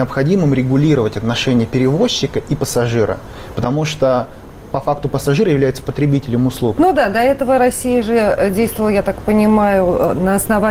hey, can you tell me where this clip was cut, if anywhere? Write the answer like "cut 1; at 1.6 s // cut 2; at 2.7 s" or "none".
cut 1; at 6.8 s